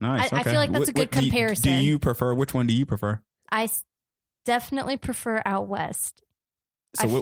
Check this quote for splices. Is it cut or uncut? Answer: uncut